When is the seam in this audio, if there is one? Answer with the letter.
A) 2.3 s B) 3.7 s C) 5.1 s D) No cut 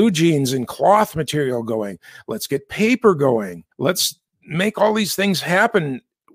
B